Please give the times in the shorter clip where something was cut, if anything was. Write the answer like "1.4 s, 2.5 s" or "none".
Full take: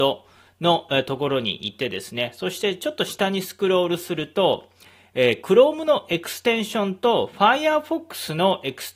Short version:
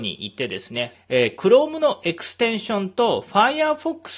0.9 s